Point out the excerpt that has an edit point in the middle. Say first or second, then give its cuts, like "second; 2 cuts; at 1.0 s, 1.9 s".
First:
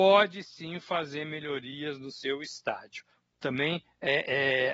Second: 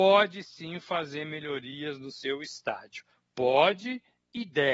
first; 1 cut; at 3.3 s